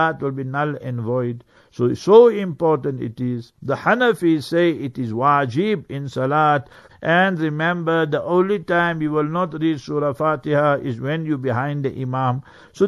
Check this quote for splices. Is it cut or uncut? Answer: cut